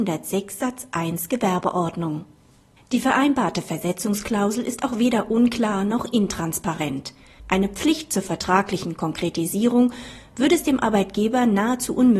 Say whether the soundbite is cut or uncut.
cut